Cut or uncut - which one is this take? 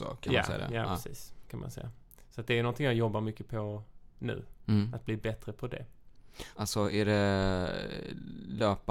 cut